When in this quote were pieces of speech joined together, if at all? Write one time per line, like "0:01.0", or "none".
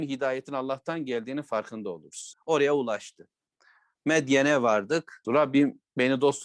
0:02.3
0:05.2